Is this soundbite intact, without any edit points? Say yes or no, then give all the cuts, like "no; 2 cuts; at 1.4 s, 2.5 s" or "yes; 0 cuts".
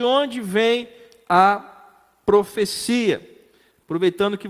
yes; 0 cuts